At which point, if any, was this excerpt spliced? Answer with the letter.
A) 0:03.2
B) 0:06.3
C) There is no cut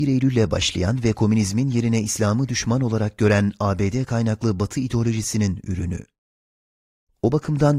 C